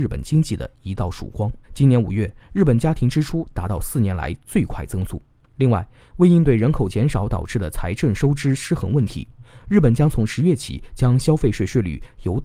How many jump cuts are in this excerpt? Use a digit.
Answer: 2